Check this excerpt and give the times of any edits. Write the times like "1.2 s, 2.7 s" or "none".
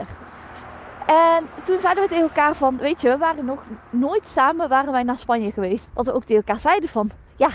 5.9 s